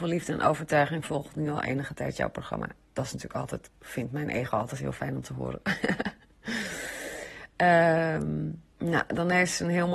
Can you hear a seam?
yes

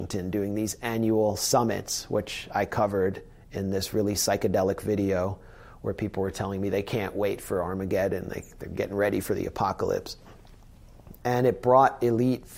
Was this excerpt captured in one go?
yes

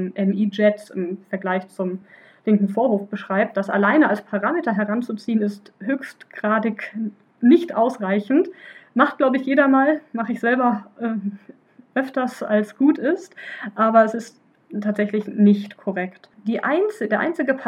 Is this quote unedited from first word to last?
yes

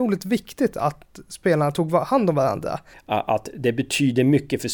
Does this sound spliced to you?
yes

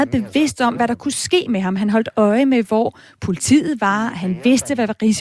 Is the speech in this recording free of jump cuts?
yes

